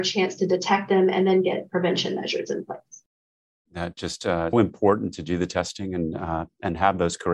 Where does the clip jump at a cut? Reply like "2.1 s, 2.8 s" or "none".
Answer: 4.5 s